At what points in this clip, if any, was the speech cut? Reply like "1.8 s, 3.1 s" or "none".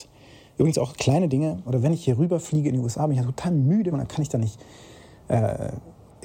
1.7 s, 3.9 s